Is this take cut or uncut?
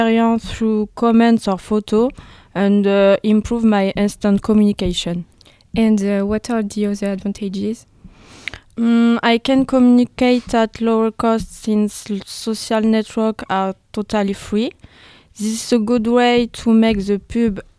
uncut